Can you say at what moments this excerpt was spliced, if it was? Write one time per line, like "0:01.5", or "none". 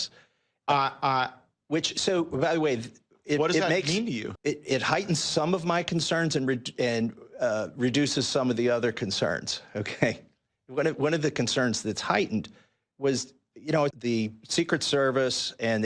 0:04.4
0:13.9